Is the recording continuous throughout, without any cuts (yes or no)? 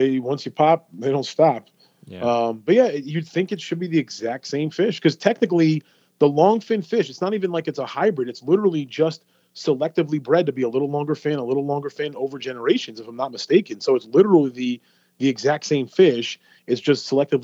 yes